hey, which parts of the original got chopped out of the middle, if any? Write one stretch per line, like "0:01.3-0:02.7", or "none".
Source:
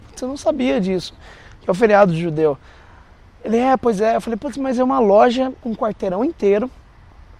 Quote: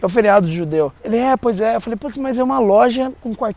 0:02.6-0:03.4